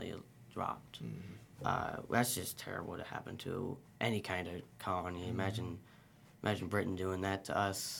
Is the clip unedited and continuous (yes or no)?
yes